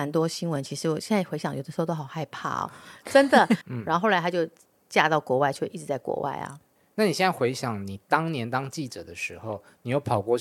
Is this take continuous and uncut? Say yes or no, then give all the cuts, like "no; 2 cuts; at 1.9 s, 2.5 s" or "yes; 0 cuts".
no; 1 cut; at 3.6 s